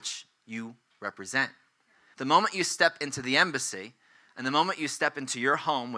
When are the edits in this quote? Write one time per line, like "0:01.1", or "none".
0:02.1